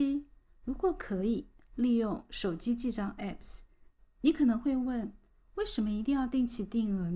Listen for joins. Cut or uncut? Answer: cut